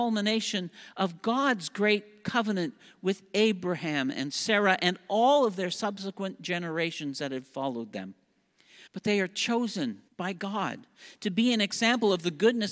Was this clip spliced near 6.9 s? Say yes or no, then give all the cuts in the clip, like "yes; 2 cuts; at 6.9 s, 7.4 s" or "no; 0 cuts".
no; 2 cuts; at 8.9 s, 10.1 s